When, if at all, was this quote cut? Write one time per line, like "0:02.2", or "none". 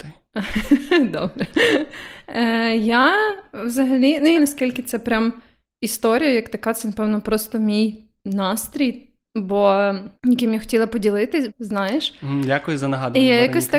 0:04.4
0:10.2
0:11.5